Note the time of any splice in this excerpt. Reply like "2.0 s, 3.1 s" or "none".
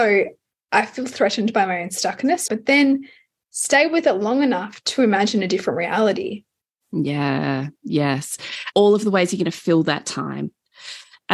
2.5 s, 8.7 s